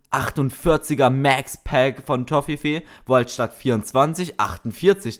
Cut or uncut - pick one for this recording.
uncut